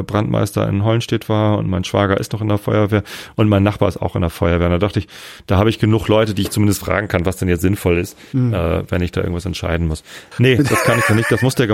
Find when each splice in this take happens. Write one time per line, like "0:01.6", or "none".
0:10.3